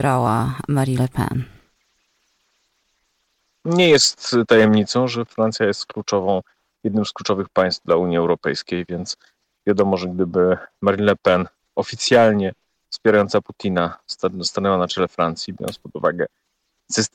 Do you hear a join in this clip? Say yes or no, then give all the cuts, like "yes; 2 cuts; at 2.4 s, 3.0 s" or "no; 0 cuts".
no; 0 cuts